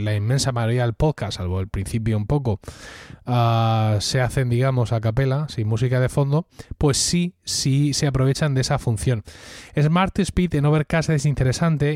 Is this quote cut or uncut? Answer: uncut